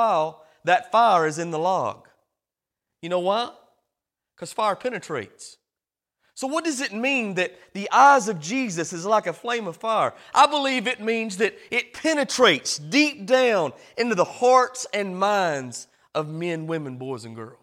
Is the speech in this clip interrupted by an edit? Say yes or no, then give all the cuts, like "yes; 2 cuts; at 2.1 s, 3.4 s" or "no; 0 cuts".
no; 0 cuts